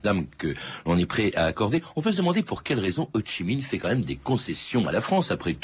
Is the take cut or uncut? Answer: uncut